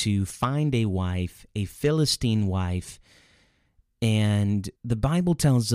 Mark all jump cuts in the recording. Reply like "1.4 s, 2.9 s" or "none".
4.8 s